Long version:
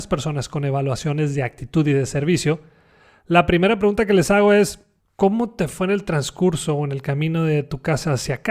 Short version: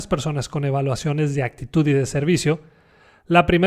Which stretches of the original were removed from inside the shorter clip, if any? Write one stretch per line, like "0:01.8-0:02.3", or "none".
none